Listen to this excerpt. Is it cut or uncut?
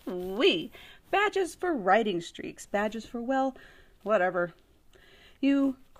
cut